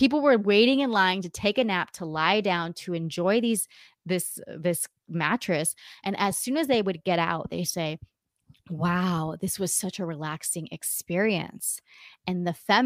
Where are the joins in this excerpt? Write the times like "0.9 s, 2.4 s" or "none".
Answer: none